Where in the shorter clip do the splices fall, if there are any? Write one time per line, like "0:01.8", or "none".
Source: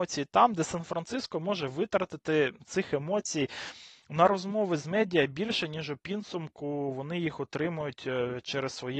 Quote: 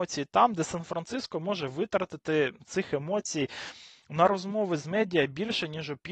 none